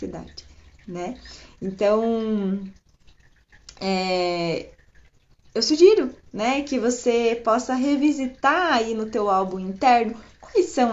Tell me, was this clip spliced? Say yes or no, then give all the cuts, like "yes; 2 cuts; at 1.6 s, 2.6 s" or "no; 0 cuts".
no; 0 cuts